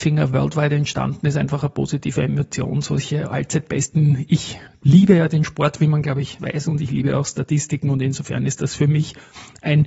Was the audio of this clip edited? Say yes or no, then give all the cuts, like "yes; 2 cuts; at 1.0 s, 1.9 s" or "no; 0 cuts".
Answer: yes; 1 cut; at 6.4 s